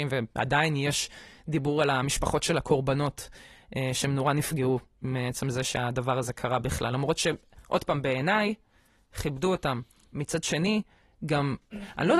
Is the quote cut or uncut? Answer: uncut